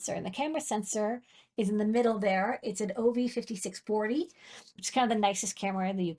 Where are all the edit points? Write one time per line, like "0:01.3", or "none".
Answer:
none